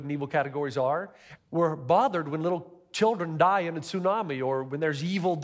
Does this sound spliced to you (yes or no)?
yes